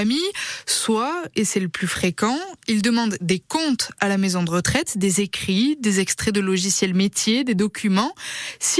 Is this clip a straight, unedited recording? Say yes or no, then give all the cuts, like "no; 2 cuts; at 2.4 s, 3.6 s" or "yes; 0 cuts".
yes; 0 cuts